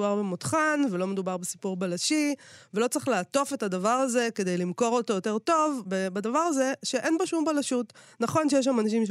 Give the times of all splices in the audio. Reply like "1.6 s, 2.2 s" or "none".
5.8 s